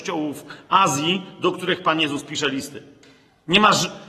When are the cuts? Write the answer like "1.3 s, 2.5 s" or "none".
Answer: none